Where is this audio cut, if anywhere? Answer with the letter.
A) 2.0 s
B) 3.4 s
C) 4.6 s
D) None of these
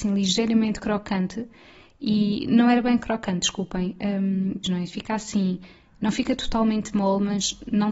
C